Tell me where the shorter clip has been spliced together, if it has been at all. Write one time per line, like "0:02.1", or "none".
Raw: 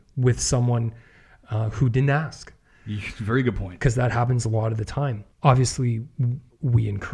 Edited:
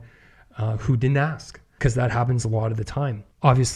0:01.8